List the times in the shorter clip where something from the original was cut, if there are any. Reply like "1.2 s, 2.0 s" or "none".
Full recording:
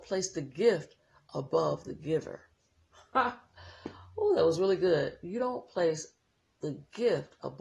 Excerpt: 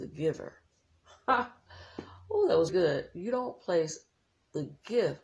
2.7 s